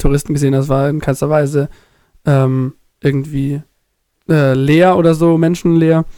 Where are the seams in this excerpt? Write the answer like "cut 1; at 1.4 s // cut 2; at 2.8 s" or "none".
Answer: none